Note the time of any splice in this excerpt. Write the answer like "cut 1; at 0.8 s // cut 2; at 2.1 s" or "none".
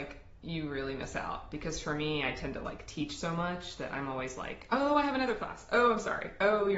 none